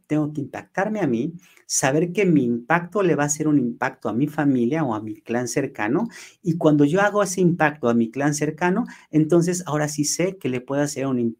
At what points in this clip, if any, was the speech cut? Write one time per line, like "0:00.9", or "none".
none